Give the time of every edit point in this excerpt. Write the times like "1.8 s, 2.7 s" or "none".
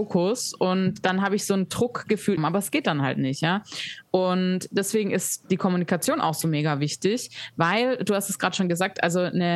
2.4 s